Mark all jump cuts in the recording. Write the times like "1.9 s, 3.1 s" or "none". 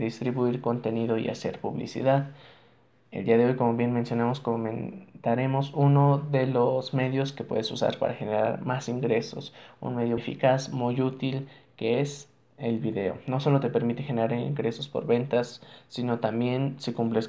10.2 s